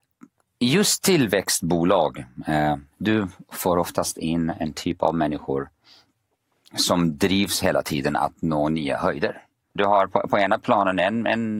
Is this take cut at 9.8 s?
yes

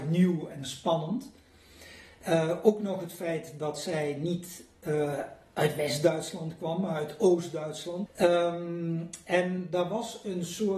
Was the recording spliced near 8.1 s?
yes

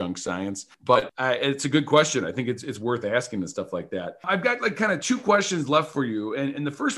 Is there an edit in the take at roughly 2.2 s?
no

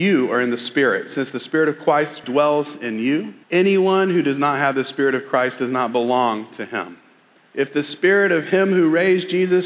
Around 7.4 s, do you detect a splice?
yes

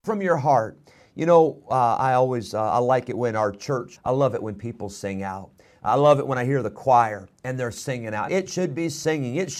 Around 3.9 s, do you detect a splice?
yes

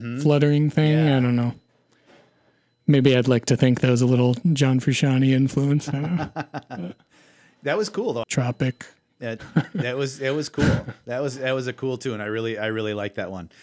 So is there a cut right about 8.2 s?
yes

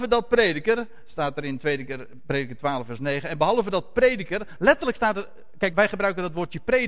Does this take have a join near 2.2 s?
no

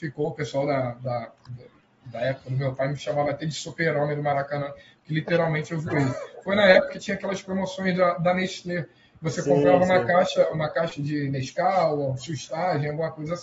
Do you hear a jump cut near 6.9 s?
yes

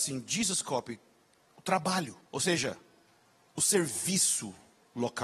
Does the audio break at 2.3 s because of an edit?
yes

